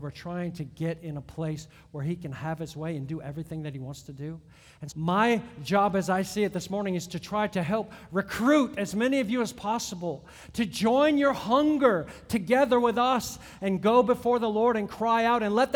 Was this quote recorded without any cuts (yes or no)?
no